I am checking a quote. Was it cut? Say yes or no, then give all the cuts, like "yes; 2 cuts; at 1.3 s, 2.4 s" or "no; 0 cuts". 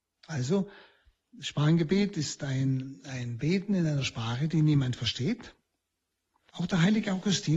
yes; 1 cut; at 6.5 s